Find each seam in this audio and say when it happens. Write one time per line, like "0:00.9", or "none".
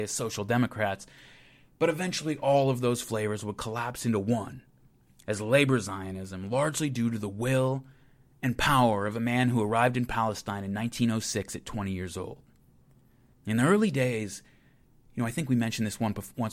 0:13.3